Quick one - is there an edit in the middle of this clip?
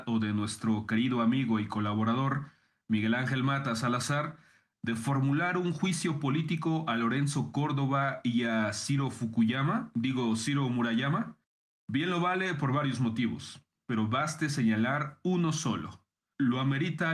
no; 0 cuts

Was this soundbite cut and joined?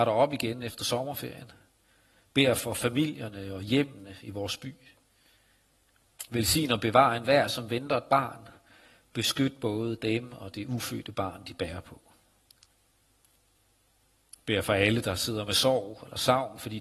no; 0 cuts

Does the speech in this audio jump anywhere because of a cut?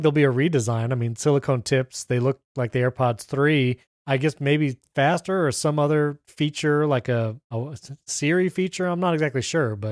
no; 0 cuts

